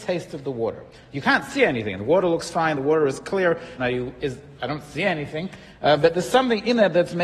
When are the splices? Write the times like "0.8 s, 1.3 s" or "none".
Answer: 3.8 s